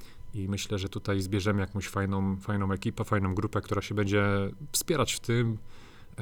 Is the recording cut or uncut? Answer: uncut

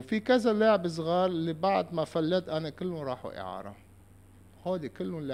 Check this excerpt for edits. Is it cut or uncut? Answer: uncut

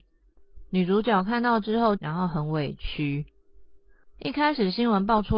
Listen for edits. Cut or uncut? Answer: cut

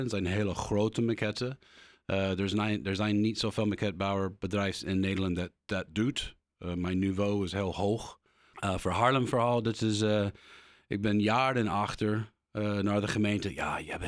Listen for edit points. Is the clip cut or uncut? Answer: cut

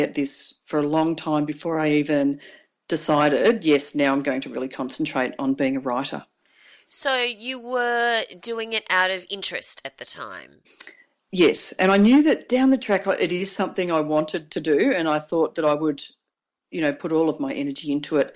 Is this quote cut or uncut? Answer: uncut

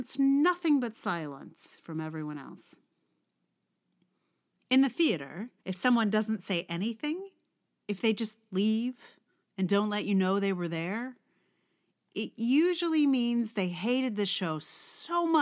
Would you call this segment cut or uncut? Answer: cut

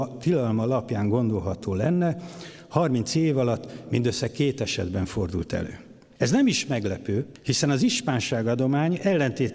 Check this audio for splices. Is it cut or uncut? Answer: uncut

